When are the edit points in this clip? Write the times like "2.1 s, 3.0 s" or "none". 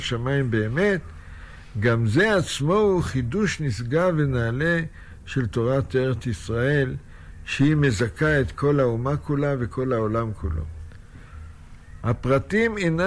12.0 s